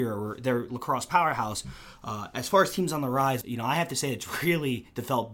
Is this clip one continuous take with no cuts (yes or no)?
no